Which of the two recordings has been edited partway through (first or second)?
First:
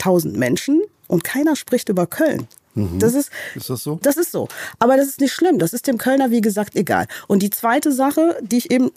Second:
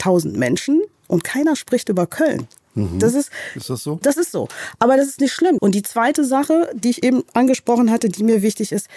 second